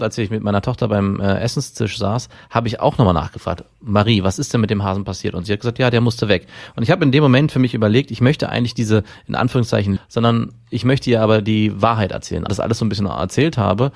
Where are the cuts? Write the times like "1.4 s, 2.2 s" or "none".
10.0 s, 12.5 s